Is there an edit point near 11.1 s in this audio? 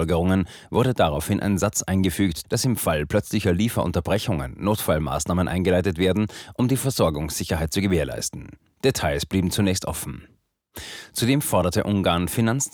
no; 1 cut; at 2.4 s

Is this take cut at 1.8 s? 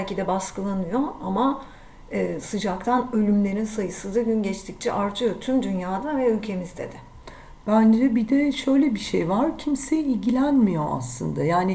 no; 0 cuts

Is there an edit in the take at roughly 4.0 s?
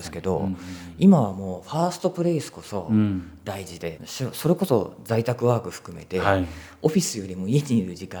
yes; 1 cut; at 4.0 s

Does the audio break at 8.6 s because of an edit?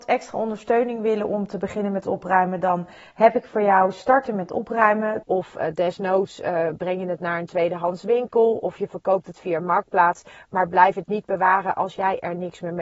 no; 1 cut; at 5.2 s

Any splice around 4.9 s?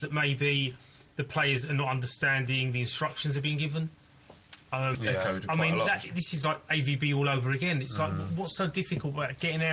yes; 1 cut; at 4.9 s

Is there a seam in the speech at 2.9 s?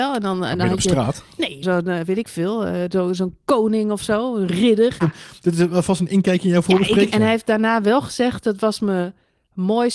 no; 3 cuts; at 1.6 s, 5.0 s, 7.1 s

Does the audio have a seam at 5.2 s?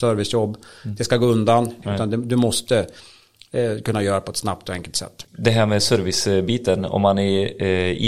yes; 2 cuts; at 1.8 s, 5.2 s

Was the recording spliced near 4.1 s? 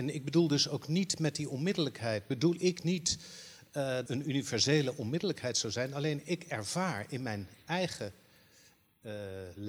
yes; 1 cut; at 4.1 s

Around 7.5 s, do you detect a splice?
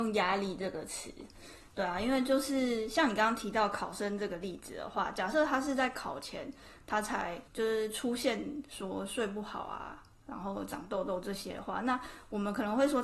yes; 1 cut; at 7.5 s

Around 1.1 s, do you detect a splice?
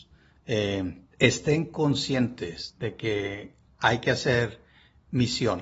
yes; 1 cut; at 1.1 s

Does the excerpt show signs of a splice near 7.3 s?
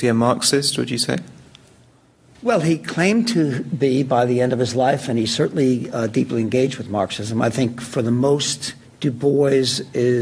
no; 1 cut; at 8.8 s

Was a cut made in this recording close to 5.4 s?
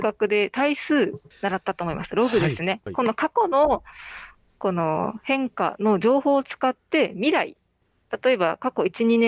no; 1 cut; at 2.9 s

